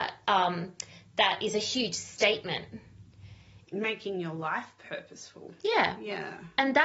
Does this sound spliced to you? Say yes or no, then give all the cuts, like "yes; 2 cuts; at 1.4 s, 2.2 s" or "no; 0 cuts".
yes; 1 cut; at 3.6 s